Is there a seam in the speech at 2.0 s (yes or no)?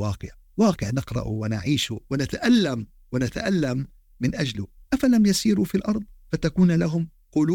yes